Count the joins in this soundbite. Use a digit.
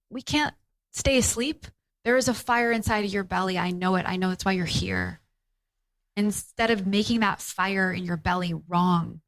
1